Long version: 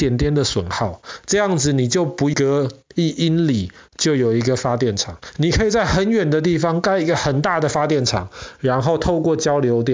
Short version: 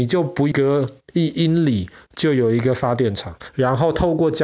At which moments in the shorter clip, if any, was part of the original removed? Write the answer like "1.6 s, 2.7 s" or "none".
3.5 s